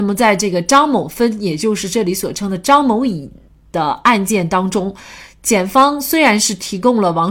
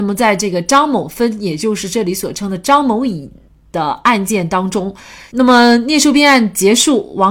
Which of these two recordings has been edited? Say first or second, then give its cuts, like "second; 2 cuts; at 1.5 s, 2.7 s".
second; 1 cut; at 5.3 s